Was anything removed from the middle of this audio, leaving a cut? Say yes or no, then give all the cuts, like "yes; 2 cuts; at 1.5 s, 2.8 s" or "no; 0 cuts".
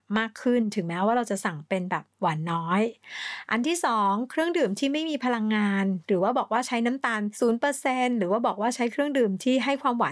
no; 0 cuts